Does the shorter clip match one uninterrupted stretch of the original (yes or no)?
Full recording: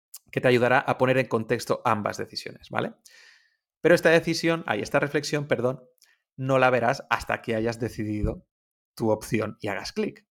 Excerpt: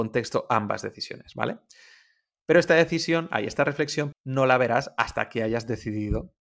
no